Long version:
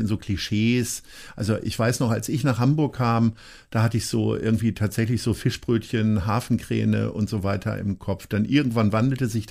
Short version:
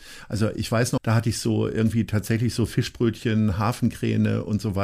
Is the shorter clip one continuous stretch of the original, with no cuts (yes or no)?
no